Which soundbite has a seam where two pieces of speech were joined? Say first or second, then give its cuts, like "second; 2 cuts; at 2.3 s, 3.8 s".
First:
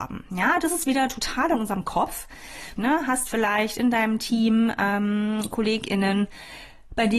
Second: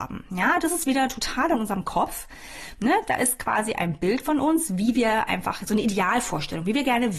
first; 1 cut; at 2.8 s